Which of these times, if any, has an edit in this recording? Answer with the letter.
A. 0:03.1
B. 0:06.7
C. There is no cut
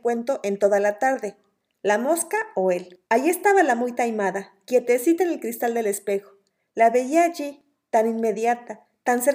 A